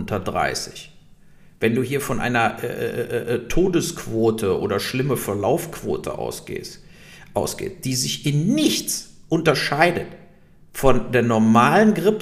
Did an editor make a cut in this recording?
no; 0 cuts

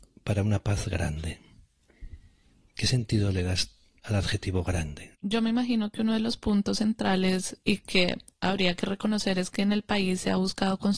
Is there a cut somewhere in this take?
yes; 2 cuts; at 5.1 s, 7.6 s

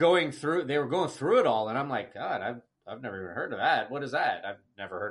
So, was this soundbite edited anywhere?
no; 0 cuts

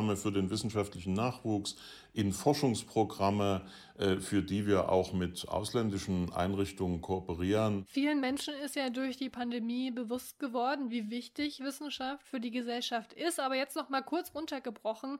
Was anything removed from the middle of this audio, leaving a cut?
no; 0 cuts

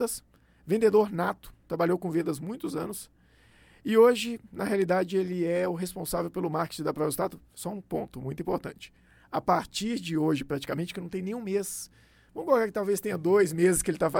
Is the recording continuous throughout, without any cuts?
yes; 0 cuts

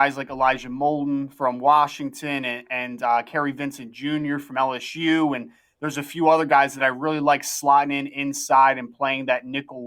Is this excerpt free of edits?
yes; 0 cuts

